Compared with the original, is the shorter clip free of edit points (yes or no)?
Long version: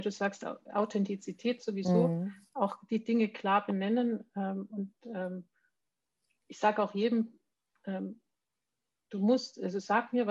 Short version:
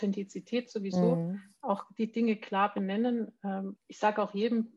no